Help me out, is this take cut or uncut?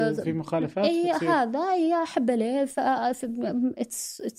uncut